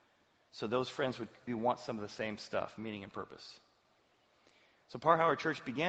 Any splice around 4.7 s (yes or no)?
no